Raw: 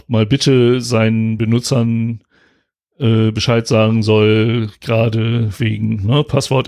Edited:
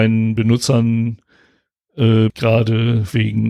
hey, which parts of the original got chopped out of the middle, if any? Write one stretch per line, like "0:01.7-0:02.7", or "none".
0:03.3-0:04.8